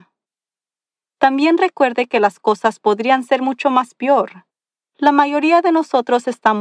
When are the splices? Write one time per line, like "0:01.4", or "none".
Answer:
0:04.8